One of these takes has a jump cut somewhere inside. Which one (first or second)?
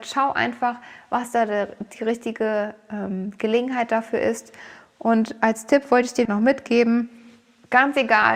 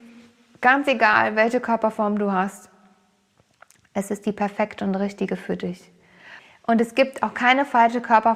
first